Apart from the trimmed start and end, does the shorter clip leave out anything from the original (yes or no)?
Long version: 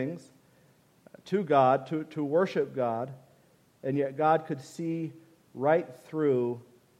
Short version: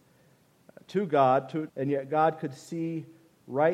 yes